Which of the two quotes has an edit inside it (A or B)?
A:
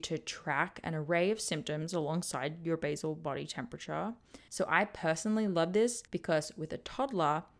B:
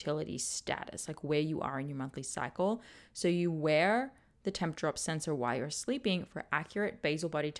A